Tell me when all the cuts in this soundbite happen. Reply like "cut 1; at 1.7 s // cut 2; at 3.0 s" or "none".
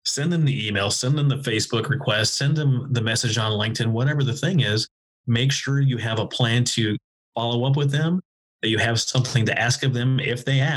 none